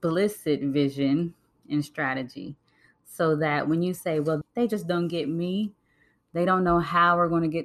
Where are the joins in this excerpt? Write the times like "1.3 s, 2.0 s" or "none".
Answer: 4.4 s